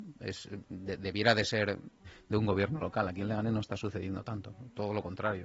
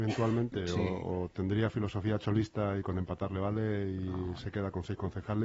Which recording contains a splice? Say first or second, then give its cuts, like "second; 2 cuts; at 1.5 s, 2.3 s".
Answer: first; 1 cut; at 2.0 s